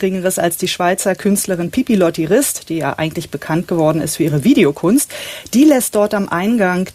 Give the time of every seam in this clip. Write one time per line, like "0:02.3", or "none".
none

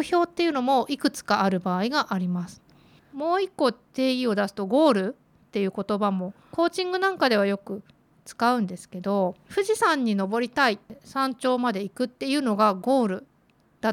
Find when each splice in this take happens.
0:03.0

